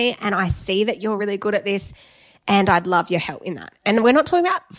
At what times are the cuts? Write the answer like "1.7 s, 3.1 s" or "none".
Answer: none